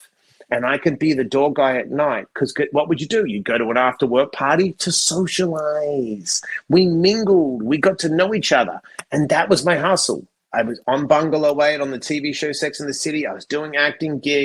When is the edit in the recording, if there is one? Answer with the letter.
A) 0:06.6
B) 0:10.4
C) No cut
B